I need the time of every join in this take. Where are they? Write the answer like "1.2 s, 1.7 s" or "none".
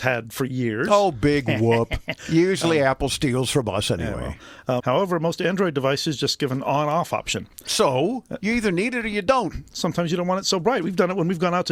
4.8 s